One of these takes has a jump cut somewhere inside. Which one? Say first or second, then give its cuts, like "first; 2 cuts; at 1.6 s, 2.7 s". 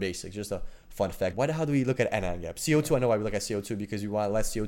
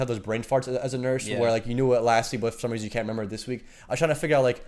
first; 1 cut; at 1.3 s